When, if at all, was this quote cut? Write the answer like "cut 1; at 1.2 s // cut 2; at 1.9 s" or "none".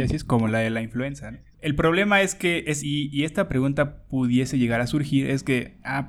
cut 1; at 1.5 s // cut 2; at 2.8 s